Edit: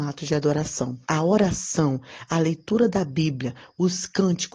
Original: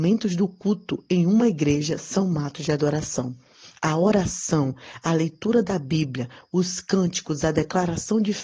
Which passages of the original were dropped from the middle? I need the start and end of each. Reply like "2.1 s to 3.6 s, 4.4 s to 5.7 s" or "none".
3.4 s to 3.8 s